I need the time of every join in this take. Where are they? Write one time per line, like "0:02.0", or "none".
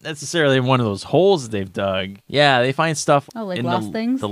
0:02.3
0:03.3